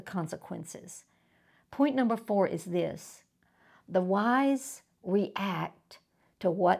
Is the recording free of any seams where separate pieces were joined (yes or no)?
yes